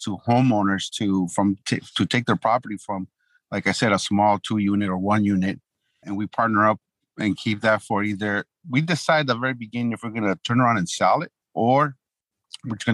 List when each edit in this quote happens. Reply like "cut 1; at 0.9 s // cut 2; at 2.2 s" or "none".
cut 1; at 6.0 s // cut 2; at 11.4 s